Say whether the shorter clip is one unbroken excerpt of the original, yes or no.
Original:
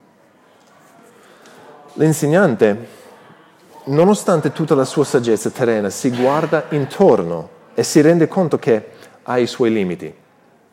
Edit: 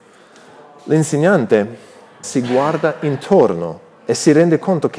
no